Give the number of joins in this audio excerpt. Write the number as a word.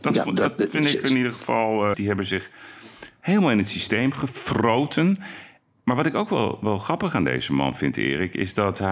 one